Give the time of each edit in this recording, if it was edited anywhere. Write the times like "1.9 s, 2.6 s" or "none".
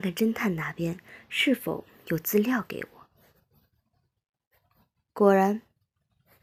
none